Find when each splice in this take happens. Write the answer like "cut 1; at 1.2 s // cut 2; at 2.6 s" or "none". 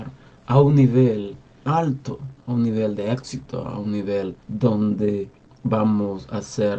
cut 1; at 1.6 s // cut 2; at 4.4 s